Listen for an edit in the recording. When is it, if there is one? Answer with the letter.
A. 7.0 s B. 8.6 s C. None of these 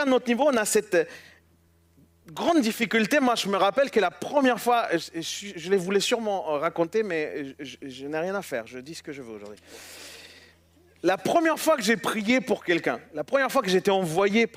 C